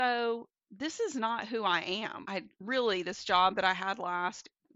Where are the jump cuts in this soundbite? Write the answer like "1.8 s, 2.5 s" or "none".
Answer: 2.2 s